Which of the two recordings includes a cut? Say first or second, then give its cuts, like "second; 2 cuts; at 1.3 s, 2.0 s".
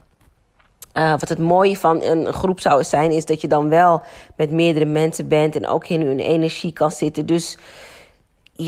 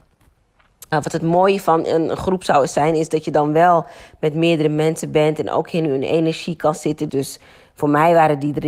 second; 2 cuts; at 0.9 s, 7.1 s